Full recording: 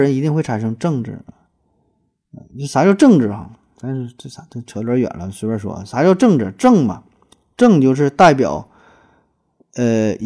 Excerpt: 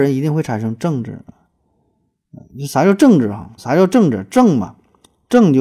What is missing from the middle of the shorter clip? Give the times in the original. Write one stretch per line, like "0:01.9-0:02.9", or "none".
0:03.6-0:05.9